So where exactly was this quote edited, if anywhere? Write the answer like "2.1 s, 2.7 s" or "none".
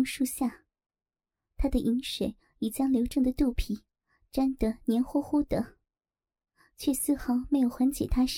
none